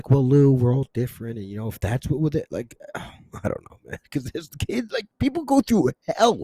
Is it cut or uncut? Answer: uncut